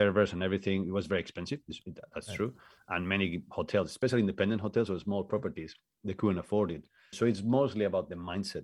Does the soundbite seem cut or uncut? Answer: cut